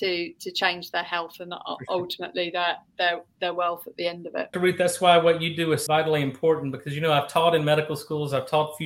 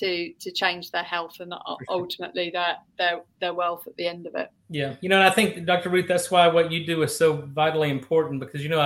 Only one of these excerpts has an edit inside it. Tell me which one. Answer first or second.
first